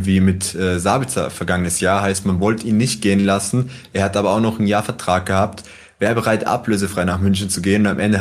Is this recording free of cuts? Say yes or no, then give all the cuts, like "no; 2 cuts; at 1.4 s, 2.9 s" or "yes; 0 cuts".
yes; 0 cuts